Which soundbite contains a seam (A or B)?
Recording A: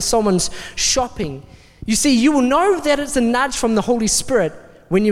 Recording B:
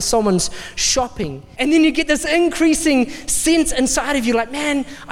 B